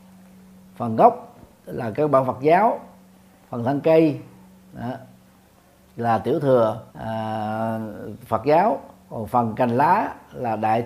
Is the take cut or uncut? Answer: cut